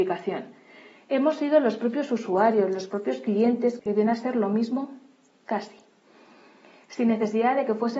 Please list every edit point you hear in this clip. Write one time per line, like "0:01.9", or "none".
0:03.8